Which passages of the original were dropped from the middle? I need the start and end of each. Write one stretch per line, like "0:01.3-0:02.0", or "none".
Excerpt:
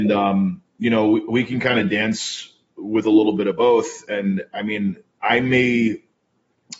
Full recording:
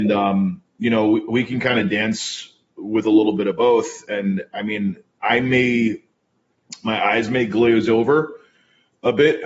none